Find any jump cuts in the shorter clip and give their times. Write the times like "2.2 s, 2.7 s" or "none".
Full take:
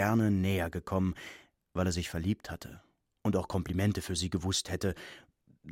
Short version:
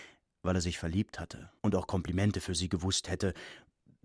1.6 s